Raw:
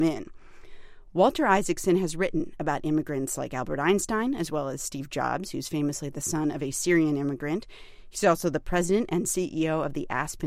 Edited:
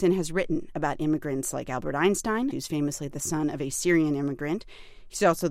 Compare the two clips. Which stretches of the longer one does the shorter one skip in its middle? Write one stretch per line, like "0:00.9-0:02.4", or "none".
0:04.3-0:05.5